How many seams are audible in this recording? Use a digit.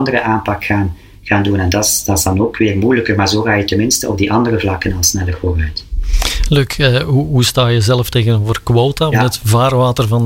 1